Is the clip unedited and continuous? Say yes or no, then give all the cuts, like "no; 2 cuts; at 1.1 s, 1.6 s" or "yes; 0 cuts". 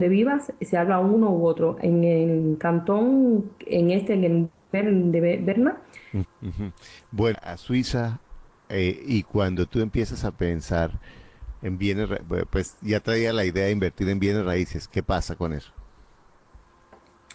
no; 2 cuts; at 6.2 s, 7.3 s